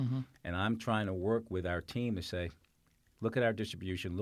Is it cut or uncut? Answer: uncut